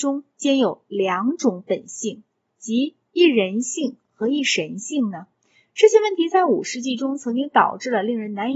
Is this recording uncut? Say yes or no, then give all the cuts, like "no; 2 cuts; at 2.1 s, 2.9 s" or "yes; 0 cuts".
yes; 0 cuts